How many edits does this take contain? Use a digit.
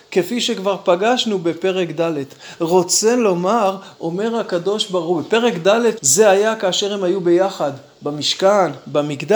1